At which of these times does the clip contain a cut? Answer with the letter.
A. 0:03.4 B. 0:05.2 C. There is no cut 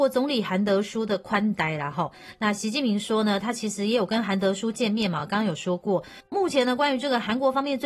C